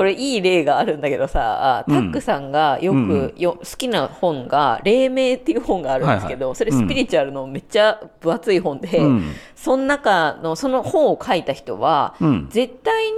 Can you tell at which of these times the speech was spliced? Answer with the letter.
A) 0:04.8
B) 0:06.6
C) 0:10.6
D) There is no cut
D